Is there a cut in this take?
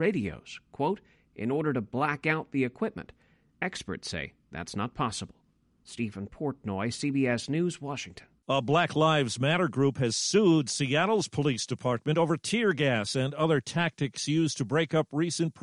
no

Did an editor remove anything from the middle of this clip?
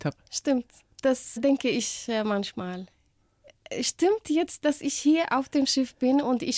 no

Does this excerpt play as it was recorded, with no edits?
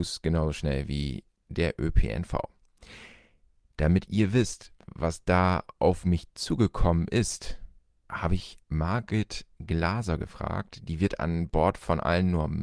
yes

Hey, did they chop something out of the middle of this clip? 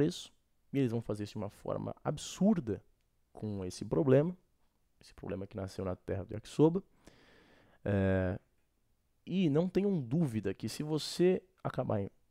no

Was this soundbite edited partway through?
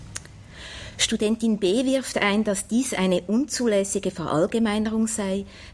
no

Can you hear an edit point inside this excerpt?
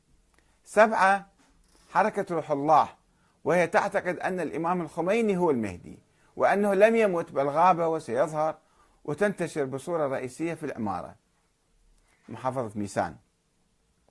no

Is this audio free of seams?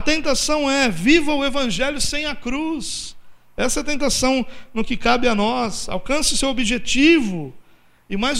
yes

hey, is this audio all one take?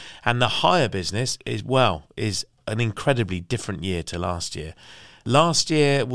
yes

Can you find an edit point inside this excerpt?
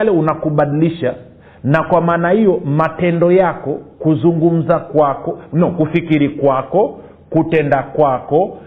no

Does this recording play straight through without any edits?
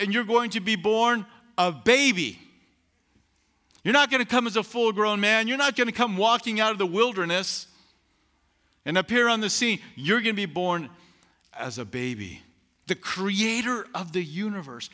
no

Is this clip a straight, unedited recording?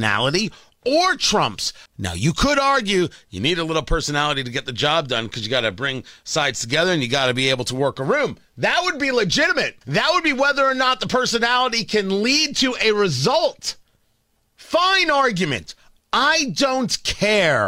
no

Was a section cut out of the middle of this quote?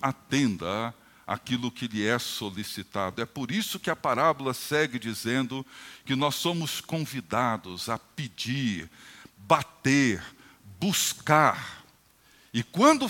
no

